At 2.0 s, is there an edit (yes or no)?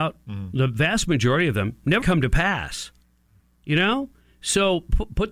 yes